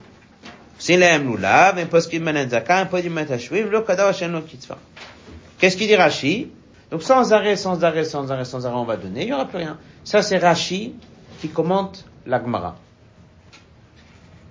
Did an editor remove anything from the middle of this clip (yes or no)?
yes